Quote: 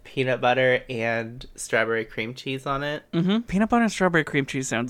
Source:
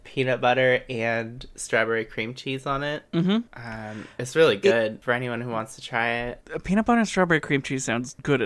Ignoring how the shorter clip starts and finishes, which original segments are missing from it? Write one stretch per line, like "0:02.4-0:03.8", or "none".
0:03.5-0:06.6

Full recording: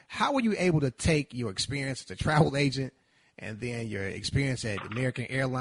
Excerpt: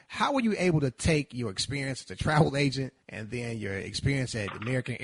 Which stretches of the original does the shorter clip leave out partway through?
0:03.0-0:03.3

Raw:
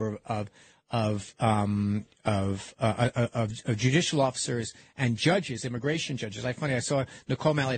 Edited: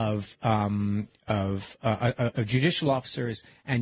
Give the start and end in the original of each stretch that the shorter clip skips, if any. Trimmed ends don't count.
0:03.3-0:03.6

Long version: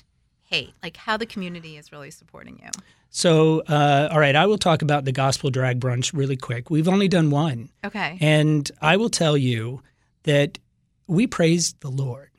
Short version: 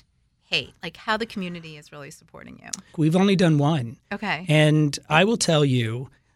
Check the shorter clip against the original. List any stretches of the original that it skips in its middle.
0:02.9-0:06.6

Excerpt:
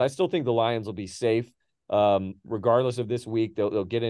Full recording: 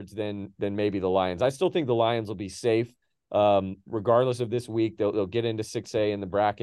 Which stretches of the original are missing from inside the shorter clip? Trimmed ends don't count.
none

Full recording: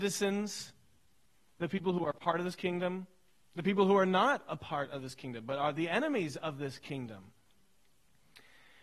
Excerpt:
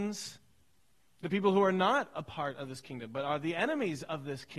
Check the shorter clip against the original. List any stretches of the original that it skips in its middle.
0:01.4-0:03.4

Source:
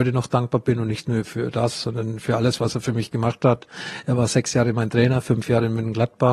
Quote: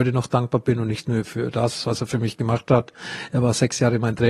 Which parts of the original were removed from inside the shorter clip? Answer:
0:01.8-0:02.6

